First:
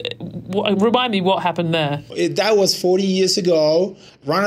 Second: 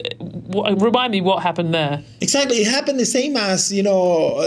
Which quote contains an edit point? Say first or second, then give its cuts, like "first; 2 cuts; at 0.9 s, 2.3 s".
first; 1 cut; at 2.1 s